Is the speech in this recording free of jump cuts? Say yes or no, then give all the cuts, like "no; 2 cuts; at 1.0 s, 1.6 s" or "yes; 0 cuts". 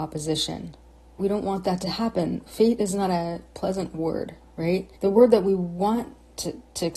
no; 2 cuts; at 1.2 s, 5.0 s